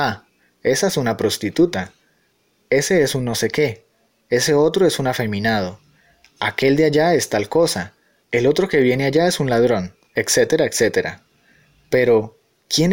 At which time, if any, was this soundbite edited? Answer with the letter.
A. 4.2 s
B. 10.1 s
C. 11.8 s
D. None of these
D